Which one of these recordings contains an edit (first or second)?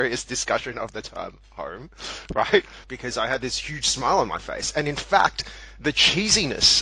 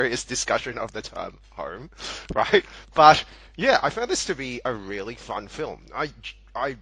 first